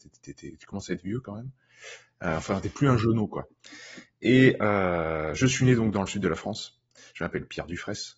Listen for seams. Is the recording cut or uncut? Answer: uncut